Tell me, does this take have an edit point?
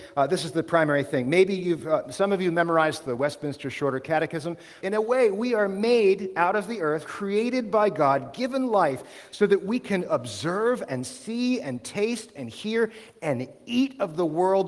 yes; 2 cuts; at 4.8 s, 7.0 s

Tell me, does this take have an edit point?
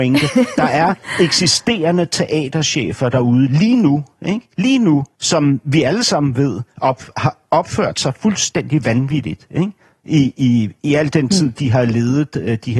yes; 1 cut; at 5.1 s

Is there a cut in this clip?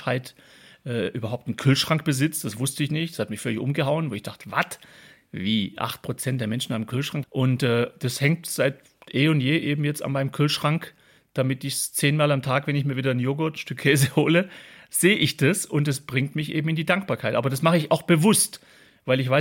yes; 1 cut; at 7.2 s

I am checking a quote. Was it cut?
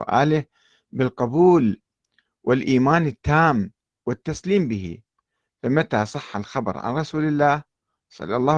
no; 0 cuts

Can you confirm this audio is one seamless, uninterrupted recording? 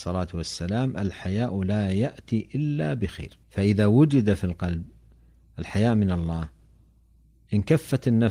no; 1 cut; at 3.4 s

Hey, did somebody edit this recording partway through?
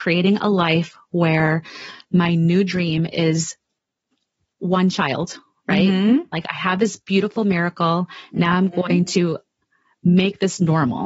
no; 0 cuts

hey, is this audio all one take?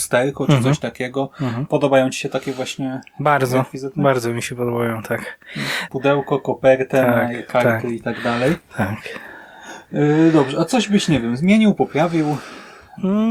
no; 1 cut; at 5.9 s

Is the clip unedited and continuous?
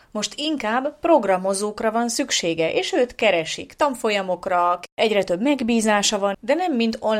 yes; 0 cuts

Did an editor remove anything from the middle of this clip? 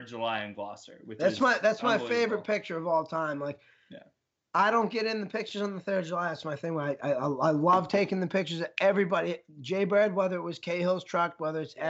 no; 0 cuts

